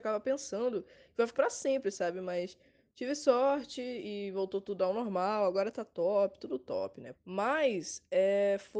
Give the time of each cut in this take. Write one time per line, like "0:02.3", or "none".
0:01.3
0:07.1